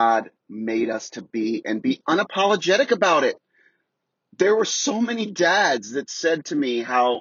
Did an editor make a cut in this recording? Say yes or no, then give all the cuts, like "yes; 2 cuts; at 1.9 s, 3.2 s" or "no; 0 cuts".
no; 0 cuts